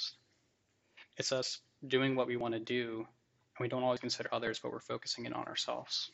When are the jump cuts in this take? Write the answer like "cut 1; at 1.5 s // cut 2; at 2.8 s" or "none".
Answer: cut 1; at 1.1 s